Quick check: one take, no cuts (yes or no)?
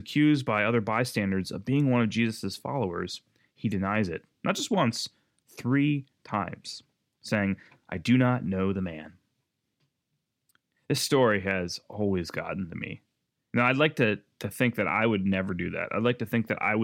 yes